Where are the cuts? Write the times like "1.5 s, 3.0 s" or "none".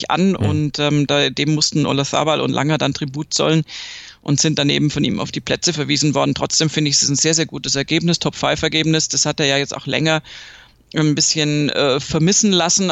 none